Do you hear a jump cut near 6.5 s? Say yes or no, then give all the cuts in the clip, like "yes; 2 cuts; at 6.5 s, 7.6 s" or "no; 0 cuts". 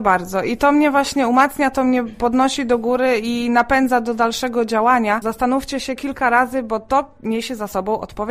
no; 1 cut; at 5.2 s